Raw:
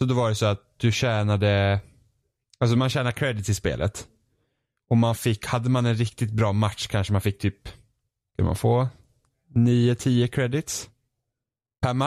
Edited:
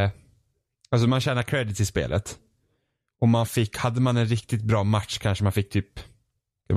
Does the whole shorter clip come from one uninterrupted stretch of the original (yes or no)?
yes